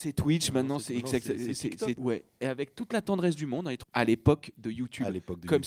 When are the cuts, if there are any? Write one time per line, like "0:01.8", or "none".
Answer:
0:02.0
0:03.8